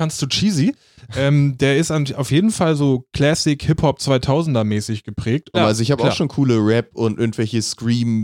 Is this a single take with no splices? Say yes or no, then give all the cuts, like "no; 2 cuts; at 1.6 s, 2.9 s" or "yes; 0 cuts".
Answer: no; 1 cut; at 5.5 s